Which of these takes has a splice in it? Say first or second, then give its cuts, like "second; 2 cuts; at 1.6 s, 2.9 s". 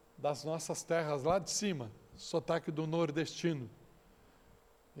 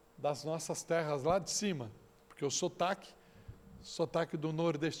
first; 1 cut; at 2.1 s